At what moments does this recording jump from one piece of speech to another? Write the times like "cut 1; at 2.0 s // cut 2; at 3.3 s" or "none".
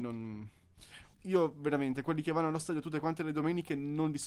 cut 1; at 1.1 s